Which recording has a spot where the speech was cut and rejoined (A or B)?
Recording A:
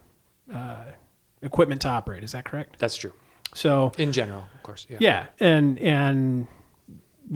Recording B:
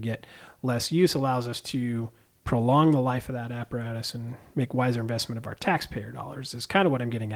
A